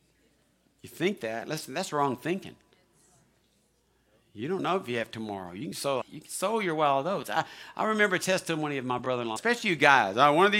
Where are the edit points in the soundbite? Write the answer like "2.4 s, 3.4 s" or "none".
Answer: 6.0 s, 9.4 s